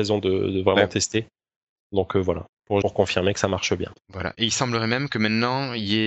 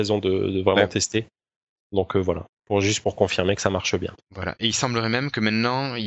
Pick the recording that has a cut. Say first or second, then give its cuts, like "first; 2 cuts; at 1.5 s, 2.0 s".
first; 1 cut; at 2.8 s